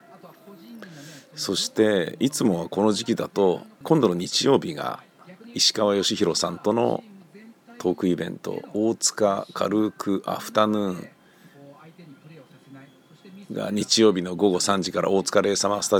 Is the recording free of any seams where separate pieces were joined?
no; 1 cut; at 3.8 s

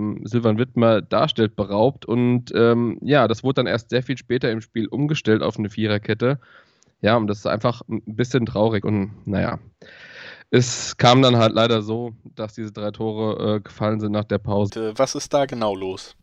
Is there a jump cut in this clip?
yes; 2 cuts; at 8.8 s, 14.7 s

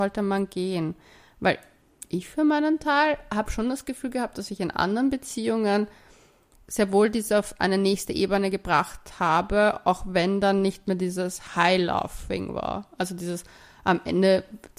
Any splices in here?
yes; 1 cut; at 11.5 s

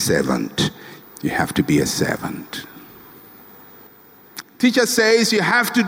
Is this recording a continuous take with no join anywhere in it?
no; 2 cuts; at 1.0 s, 4.4 s

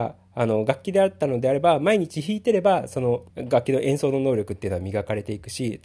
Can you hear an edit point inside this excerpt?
yes; 1 cut; at 3.3 s

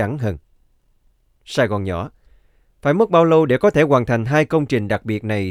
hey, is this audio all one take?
yes; 0 cuts

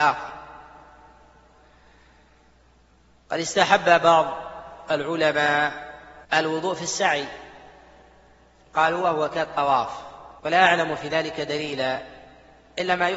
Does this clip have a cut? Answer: yes; 2 cuts; at 6.2 s, 10.4 s

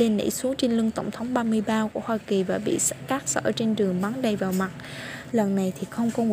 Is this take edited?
yes; 1 cut; at 5.3 s

